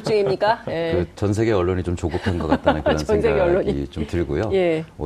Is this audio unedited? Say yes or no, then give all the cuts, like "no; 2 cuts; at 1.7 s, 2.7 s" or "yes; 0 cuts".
yes; 0 cuts